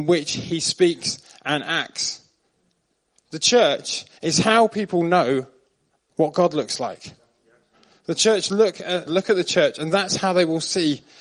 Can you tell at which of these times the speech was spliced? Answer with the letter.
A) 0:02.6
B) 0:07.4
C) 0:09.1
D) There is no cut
C